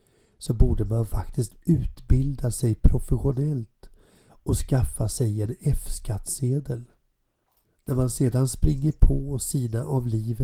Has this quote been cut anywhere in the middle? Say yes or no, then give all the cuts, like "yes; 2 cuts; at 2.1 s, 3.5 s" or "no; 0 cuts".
no; 0 cuts